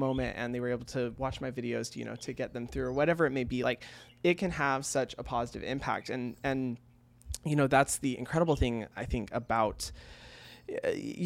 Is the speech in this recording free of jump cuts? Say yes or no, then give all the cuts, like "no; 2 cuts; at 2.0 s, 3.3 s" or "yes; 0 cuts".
yes; 0 cuts